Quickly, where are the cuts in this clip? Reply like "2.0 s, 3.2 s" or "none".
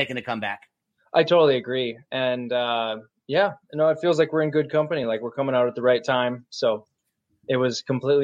none